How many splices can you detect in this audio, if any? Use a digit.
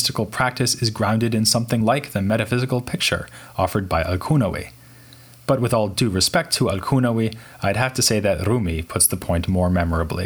0